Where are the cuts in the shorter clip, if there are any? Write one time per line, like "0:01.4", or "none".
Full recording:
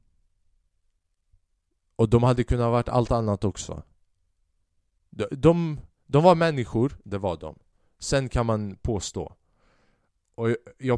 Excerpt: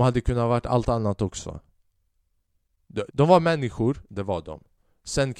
0:03.1